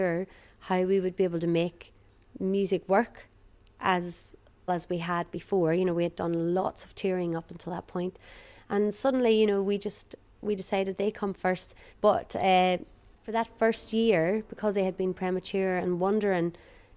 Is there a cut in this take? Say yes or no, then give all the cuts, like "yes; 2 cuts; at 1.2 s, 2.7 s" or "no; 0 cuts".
yes; 1 cut; at 4.7 s